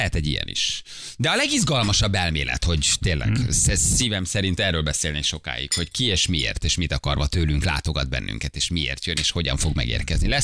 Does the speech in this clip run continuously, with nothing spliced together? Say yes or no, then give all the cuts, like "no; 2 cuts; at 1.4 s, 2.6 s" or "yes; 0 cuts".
yes; 0 cuts